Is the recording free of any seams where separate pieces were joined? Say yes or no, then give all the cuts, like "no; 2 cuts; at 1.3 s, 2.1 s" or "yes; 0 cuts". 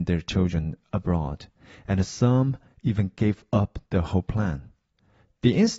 yes; 0 cuts